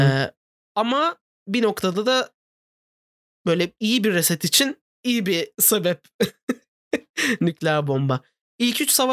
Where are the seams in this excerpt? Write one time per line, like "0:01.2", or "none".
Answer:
none